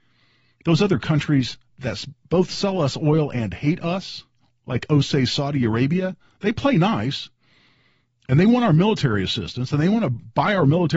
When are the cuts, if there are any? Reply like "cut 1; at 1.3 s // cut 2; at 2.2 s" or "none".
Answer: none